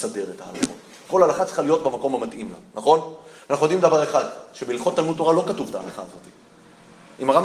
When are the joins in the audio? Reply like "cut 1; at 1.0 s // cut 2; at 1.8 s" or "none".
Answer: none